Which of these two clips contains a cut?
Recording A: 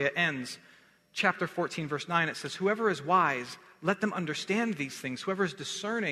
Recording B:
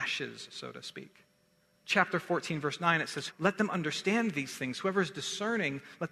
B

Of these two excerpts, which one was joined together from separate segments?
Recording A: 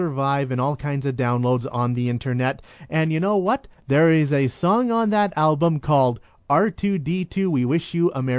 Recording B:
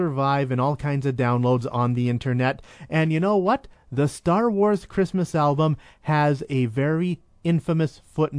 A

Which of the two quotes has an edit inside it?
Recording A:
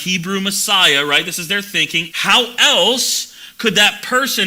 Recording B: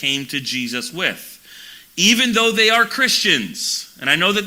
A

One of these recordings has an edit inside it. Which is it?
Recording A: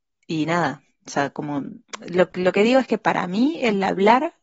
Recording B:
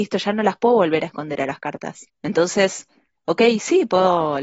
B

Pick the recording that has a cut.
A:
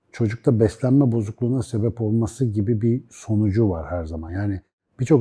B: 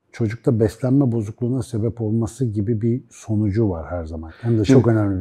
B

